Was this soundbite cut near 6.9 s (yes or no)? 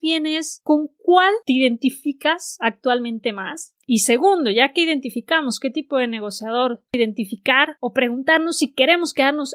yes